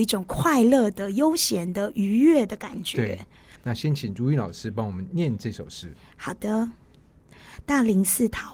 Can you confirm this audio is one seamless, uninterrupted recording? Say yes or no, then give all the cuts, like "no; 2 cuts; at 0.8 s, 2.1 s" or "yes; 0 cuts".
no; 1 cut; at 3.6 s